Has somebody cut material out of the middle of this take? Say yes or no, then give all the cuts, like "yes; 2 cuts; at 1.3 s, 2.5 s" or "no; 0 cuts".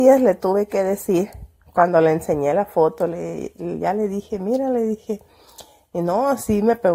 no; 0 cuts